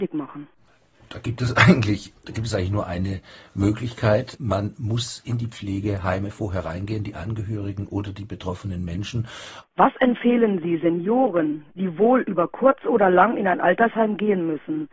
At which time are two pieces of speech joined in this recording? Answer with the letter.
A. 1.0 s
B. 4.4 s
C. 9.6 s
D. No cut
C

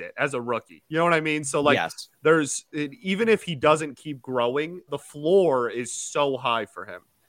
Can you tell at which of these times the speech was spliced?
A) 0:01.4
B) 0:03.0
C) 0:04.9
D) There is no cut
C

